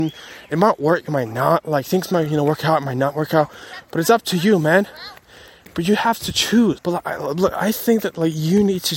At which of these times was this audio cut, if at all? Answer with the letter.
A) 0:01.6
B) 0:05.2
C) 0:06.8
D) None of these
C